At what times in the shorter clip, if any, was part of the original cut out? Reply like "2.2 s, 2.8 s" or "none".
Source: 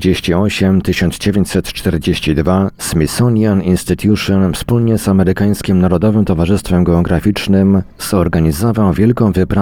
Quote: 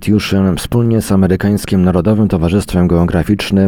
none